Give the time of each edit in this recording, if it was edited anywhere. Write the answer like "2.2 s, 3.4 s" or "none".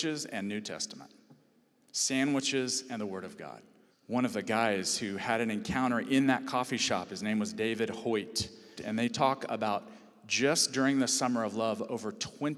3.9 s, 8.8 s

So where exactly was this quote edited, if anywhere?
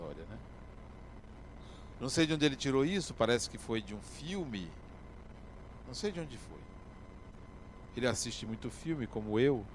none

